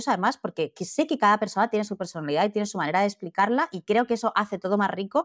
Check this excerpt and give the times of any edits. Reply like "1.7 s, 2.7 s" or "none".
none